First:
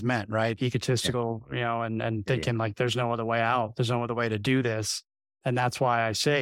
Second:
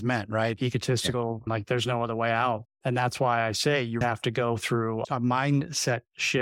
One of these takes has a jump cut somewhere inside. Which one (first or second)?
second